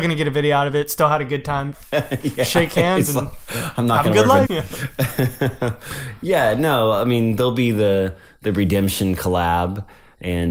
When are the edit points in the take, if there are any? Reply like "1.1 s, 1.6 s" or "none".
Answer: 1.7 s, 4.4 s